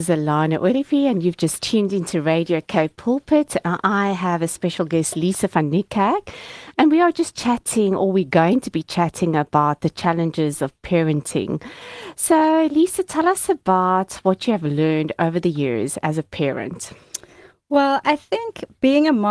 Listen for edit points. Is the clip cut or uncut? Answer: uncut